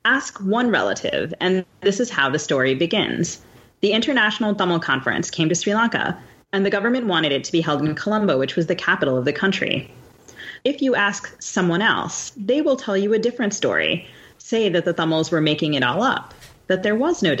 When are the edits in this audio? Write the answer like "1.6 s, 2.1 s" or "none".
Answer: 10.6 s

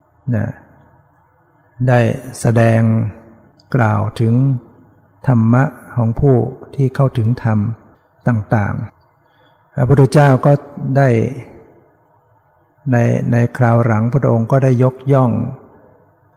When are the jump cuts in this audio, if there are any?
none

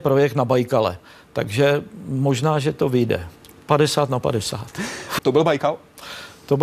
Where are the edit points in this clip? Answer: 3.5 s, 5.2 s

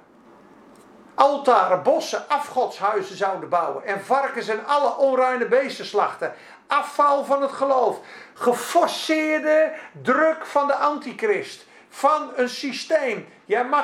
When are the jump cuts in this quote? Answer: none

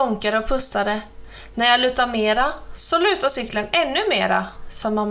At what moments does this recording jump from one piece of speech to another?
none

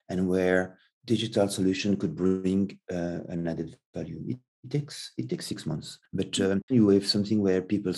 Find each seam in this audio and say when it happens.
6.7 s

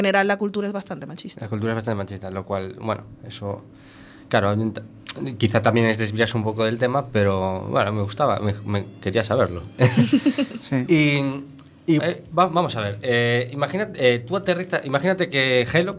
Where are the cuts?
12.0 s

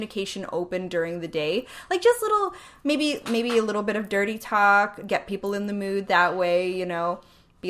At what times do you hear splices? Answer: 5.1 s

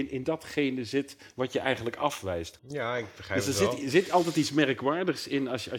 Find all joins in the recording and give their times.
2.6 s

